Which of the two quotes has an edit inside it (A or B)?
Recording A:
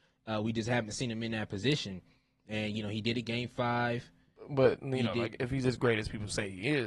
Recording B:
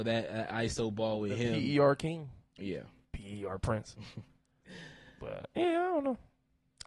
B